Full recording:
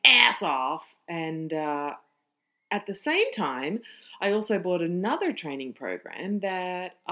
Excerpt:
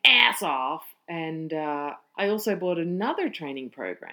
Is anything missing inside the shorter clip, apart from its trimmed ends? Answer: yes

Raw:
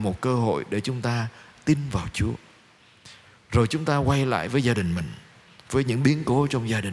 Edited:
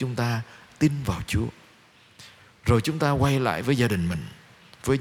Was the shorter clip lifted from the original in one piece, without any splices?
yes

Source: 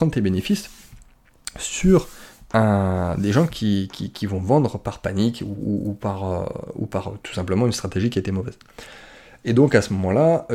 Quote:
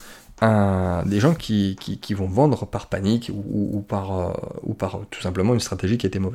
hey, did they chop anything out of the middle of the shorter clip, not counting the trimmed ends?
no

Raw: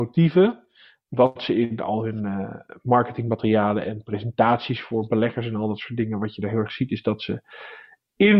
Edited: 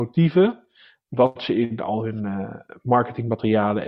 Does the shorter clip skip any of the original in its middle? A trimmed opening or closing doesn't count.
no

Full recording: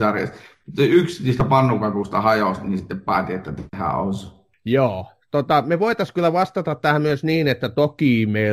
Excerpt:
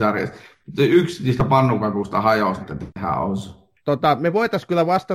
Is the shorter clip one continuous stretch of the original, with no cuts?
no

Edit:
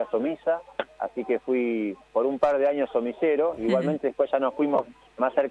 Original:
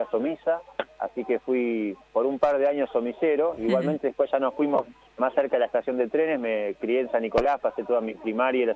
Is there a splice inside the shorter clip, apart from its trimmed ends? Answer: no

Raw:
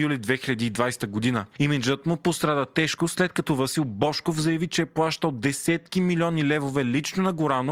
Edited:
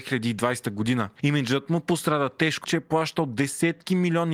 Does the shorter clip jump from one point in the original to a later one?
yes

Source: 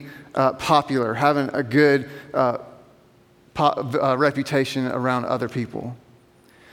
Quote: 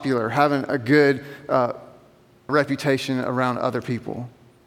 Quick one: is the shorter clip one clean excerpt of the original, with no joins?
no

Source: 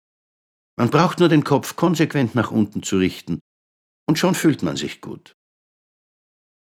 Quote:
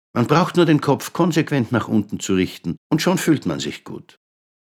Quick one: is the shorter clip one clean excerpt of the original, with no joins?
no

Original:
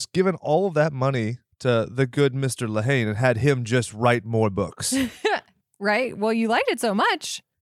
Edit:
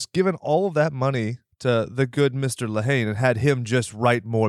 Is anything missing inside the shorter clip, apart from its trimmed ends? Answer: no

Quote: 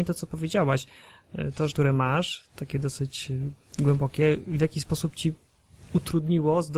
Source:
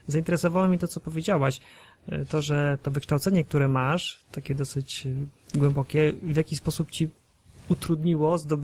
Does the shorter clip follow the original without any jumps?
no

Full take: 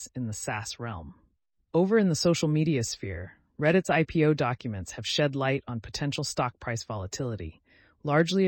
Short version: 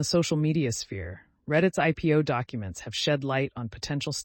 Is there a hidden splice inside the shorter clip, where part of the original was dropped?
no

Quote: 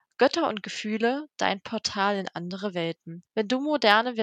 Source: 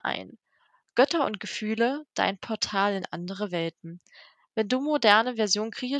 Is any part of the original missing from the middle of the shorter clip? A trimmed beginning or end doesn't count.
yes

